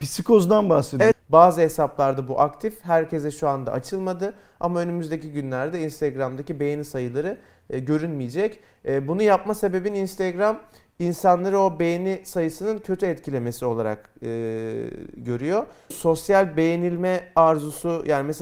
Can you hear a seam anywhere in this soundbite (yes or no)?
yes